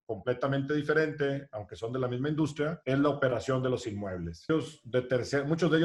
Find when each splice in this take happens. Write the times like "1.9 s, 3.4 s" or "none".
4.5 s